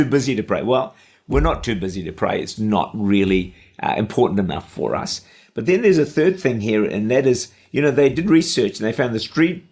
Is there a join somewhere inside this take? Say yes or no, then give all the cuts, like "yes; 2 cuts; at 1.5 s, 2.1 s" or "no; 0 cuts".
yes; 1 cut; at 2.6 s